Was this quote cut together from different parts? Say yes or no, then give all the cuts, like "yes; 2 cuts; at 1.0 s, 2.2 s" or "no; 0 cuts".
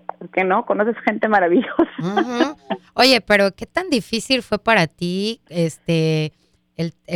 no; 0 cuts